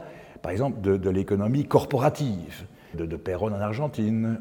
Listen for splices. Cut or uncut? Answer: cut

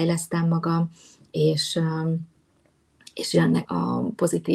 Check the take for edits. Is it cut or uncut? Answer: cut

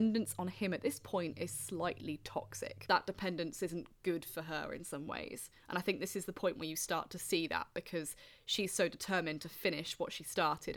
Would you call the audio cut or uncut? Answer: uncut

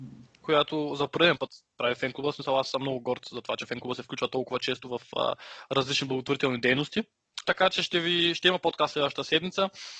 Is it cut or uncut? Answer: cut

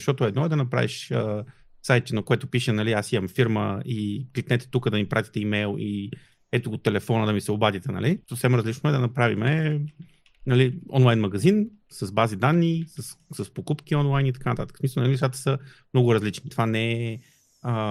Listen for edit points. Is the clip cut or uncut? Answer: cut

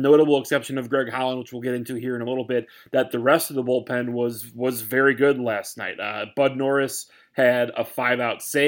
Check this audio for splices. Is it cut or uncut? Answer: uncut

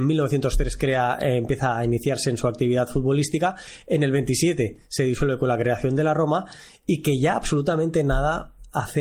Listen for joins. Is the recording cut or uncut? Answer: uncut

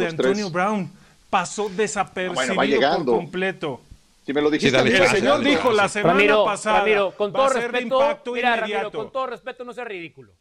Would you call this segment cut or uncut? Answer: uncut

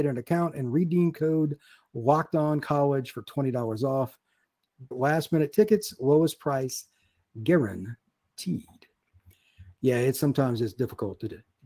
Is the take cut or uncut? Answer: cut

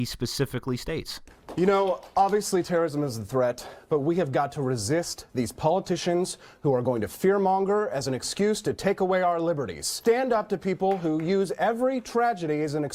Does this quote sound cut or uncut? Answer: uncut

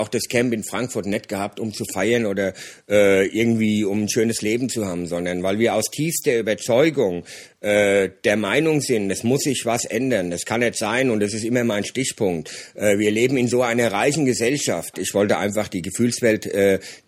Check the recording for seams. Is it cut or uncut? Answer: cut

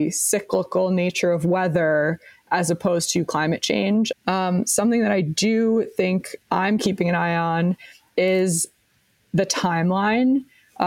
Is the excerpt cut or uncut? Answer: cut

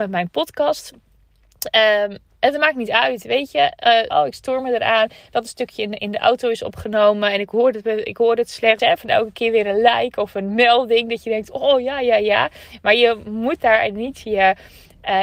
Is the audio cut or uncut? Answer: cut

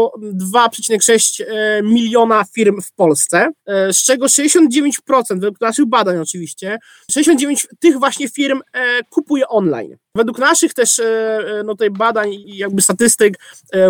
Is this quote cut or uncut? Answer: cut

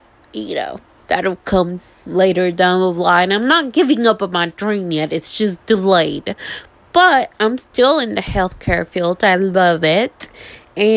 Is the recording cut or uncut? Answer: uncut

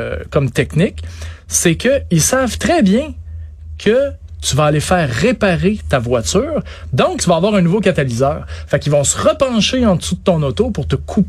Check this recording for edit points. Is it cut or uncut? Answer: cut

